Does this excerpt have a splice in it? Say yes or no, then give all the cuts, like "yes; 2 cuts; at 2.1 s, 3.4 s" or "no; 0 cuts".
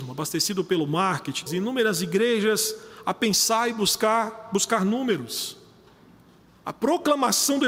yes; 1 cut; at 1.5 s